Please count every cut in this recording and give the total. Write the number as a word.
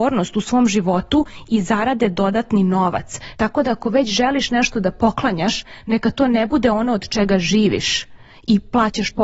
one